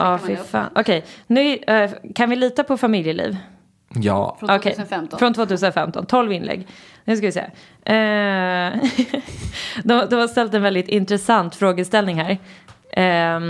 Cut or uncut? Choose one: uncut